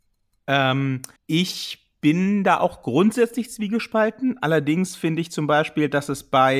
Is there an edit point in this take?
yes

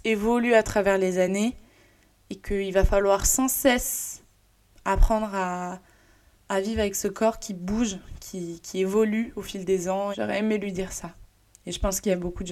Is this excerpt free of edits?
no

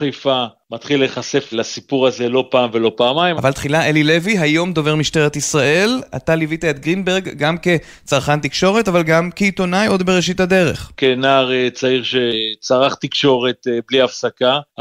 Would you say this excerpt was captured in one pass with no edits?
no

